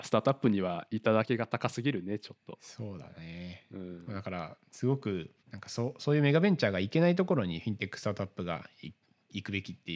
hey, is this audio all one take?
no; 1 cut; at 5.4 s

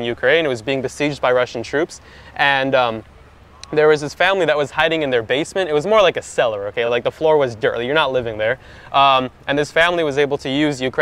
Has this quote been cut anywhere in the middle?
no; 0 cuts

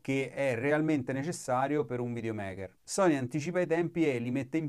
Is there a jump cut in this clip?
no; 0 cuts

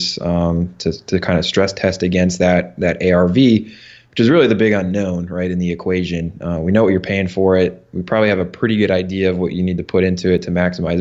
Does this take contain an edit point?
no; 0 cuts

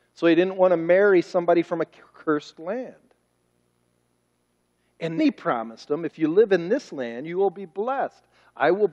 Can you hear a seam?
yes; 1 cut; at 5.2 s

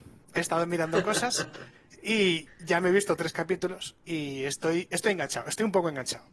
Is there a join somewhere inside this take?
no; 0 cuts

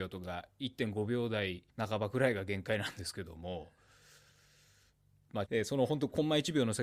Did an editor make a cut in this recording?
yes; 2 cuts; at 1.7 s, 5.5 s

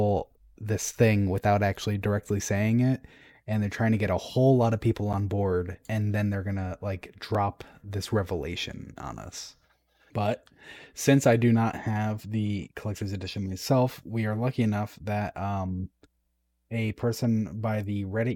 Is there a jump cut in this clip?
yes; 1 cut; at 10.1 s

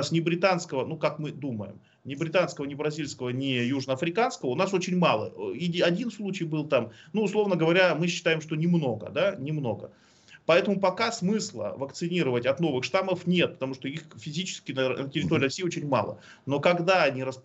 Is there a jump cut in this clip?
no; 0 cuts

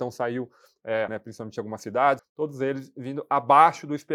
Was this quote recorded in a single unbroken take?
no; 2 cuts; at 1.1 s, 2.2 s

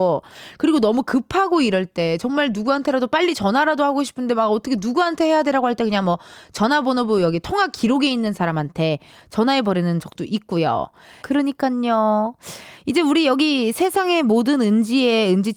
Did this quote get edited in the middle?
yes; 1 cut; at 11.2 s

